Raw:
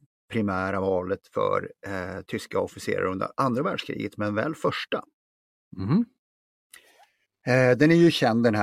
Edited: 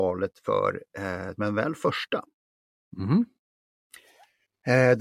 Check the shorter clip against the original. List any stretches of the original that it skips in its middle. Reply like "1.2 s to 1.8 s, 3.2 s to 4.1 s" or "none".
2.2 s to 4.2 s